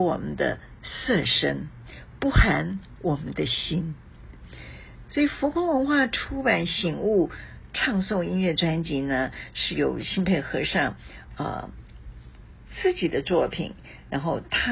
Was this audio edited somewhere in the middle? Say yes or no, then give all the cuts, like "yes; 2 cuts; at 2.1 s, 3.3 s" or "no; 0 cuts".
no; 0 cuts